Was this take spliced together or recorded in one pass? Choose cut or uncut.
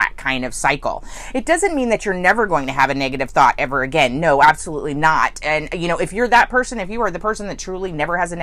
uncut